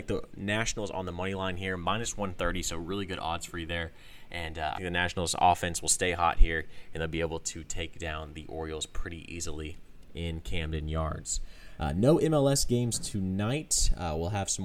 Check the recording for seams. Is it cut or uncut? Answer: cut